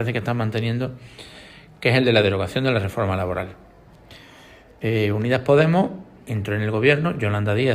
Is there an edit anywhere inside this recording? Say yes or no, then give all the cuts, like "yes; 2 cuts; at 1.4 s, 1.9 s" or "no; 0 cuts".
no; 0 cuts